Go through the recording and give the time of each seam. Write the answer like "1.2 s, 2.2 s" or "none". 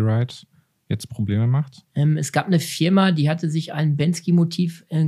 1.9 s